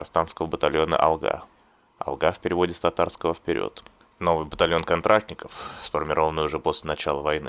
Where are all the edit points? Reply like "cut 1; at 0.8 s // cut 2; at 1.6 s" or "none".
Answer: none